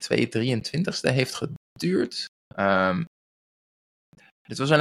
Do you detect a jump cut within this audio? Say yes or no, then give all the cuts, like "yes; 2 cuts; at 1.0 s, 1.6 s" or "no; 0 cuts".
yes; 1 cut; at 2.4 s